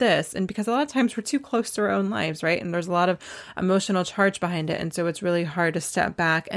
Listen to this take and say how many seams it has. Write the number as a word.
zero